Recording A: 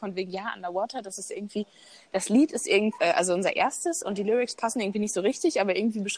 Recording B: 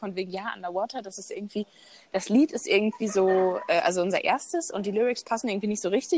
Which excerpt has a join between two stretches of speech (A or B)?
A